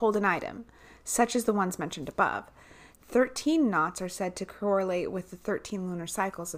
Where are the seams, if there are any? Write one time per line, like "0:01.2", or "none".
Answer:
0:02.9